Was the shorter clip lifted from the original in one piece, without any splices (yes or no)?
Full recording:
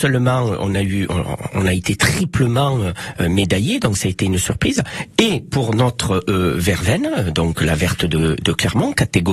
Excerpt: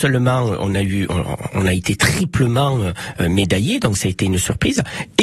yes